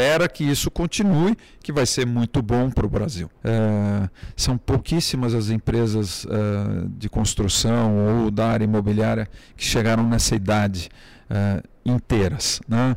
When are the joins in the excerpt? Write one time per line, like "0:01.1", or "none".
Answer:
0:03.4

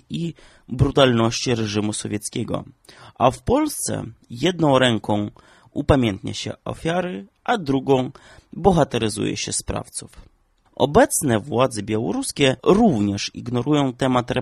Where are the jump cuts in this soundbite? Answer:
0:10.7
0:12.6

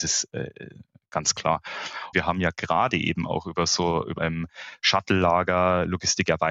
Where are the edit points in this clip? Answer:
0:02.1
0:04.2

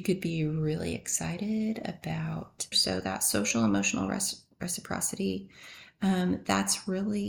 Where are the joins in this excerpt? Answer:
0:02.7

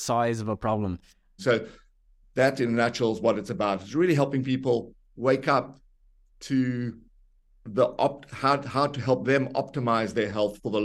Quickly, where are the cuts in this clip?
0:01.4

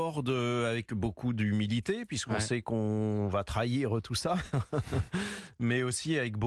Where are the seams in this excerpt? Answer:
none

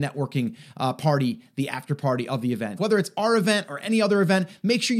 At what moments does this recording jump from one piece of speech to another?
0:02.8

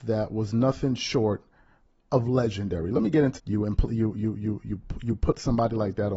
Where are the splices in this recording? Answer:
0:03.4

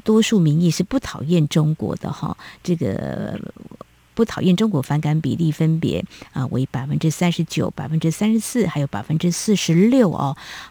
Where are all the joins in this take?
none

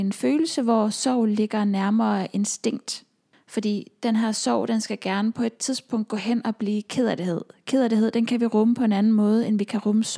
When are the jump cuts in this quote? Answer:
0:03.3

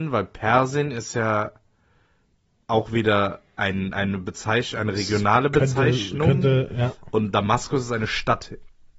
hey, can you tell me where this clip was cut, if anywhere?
none

